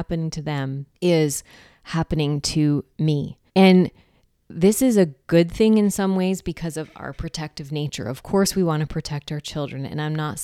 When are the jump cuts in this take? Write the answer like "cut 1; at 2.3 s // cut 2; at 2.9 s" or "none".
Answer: cut 1; at 0.9 s // cut 2; at 3.5 s